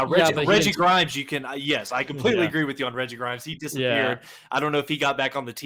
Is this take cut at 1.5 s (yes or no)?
no